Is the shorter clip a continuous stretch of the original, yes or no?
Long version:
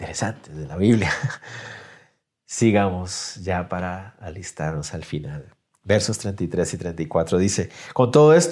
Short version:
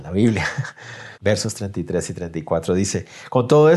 no